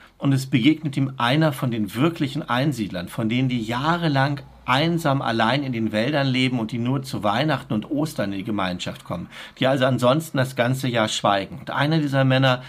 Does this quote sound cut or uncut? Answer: uncut